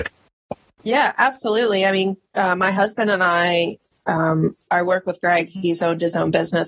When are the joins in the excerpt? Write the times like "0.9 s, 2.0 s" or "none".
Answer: 4.7 s